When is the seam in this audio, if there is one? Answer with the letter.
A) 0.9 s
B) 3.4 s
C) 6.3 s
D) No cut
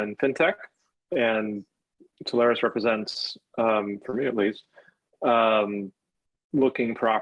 A